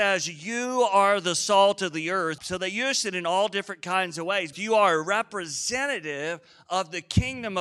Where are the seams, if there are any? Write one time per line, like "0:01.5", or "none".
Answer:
0:02.4
0:04.5